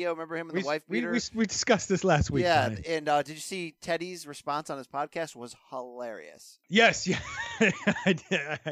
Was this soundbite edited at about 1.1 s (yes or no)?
no